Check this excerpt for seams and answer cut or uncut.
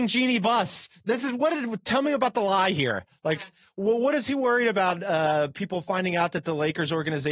uncut